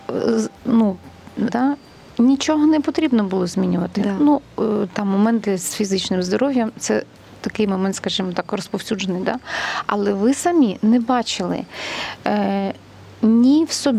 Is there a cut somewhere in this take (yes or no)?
yes